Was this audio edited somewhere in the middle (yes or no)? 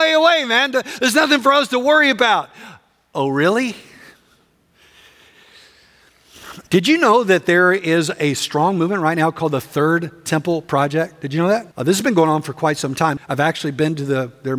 yes